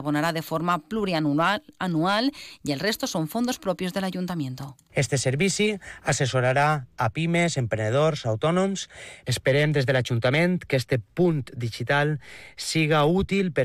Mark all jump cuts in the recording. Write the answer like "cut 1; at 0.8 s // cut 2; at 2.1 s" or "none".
cut 1; at 4.9 s